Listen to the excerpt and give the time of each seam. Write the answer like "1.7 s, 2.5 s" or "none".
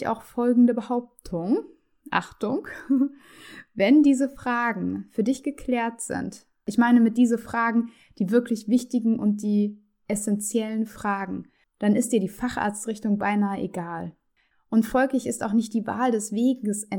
11.6 s, 14.5 s